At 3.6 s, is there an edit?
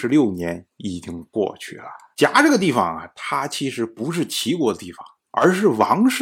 no; 1 cut; at 2.1 s

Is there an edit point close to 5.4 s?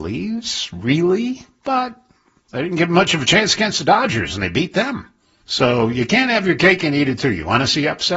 yes; 1 cut; at 5.4 s

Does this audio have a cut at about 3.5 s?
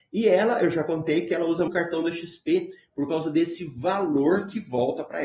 no; 1 cut; at 1.7 s

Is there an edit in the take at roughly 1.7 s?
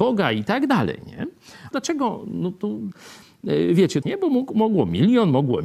yes; 2 cuts; at 1.7 s, 4.0 s

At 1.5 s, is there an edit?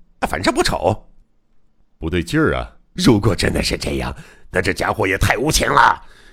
no; 1 cut; at 3.0 s

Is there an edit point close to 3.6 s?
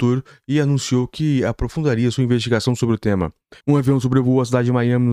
yes; 1 cut; at 3.6 s

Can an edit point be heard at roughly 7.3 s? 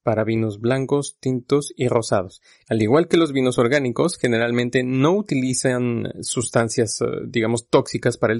no; 1 cut; at 2.6 s

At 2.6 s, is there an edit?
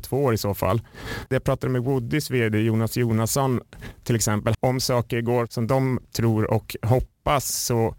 no; 2 cuts; at 1.3 s, 4.5 s

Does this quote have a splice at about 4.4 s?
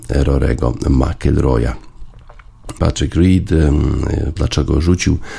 yes; 2 cuts; at 2.8 s, 4.4 s

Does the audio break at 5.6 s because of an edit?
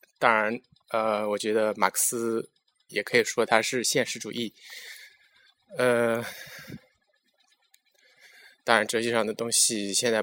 no; 1 cut; at 2.9 s

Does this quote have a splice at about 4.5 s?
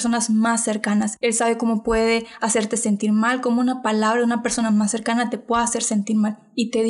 no; 1 cut; at 1.2 s

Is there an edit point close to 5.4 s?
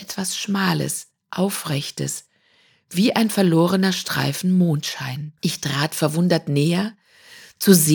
yes; 1 cut; at 5.4 s

